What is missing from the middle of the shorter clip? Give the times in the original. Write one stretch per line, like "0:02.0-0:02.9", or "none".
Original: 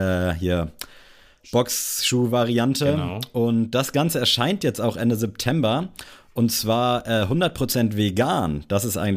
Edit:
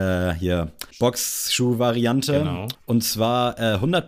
0:00.9-0:01.4
0:03.3-0:06.2